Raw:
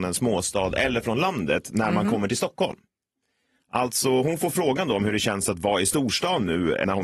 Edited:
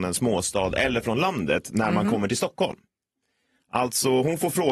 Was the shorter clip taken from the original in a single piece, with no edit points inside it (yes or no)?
yes